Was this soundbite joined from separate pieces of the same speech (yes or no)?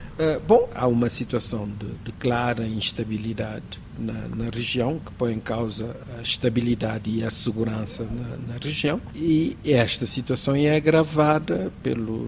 no